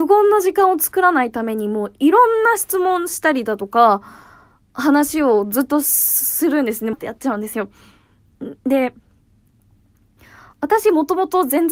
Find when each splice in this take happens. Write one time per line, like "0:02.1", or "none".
0:06.9